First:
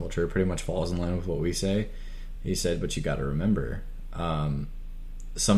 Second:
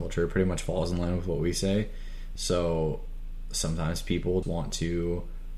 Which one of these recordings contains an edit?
second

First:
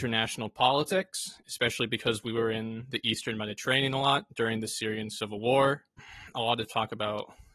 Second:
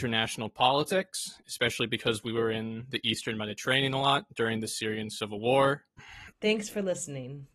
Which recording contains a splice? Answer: second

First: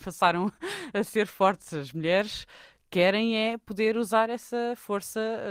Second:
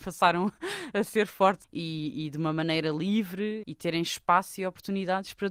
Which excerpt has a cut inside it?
second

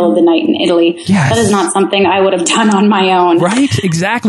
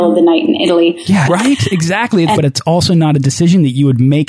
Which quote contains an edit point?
second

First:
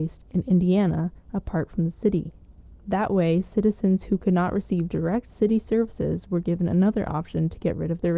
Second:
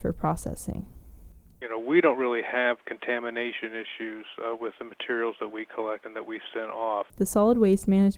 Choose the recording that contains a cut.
second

